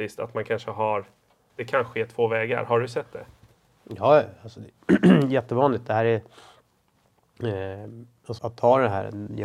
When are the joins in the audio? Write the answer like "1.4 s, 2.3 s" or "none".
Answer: 1.5 s, 8.4 s